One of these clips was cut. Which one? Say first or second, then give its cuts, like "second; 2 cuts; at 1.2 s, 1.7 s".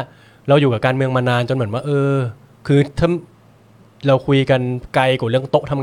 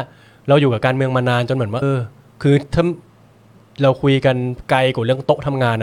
second; 1 cut; at 1.8 s